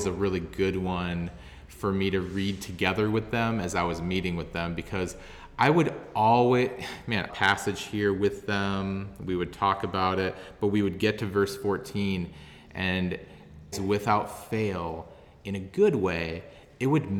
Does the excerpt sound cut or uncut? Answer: cut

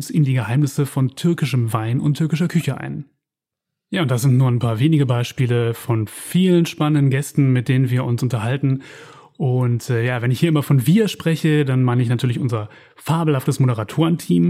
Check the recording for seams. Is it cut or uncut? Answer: uncut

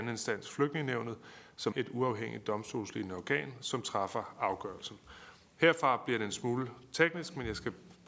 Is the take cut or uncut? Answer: cut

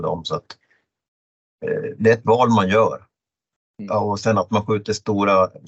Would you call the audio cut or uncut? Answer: uncut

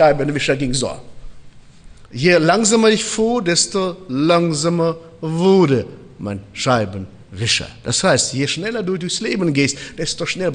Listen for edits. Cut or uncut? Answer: uncut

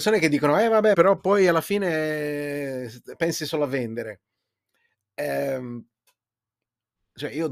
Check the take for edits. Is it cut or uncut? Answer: cut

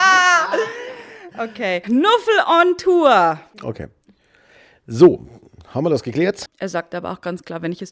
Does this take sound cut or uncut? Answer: cut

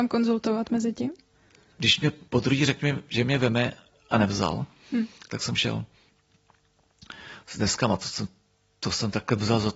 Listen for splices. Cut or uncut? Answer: uncut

